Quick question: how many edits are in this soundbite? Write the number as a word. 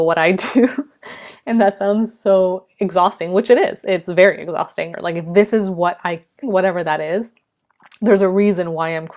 two